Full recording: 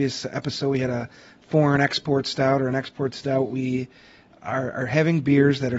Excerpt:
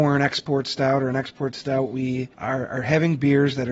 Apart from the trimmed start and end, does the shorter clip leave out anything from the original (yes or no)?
yes